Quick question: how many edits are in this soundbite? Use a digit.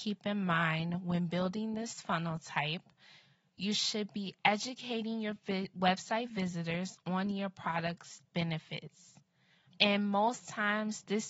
1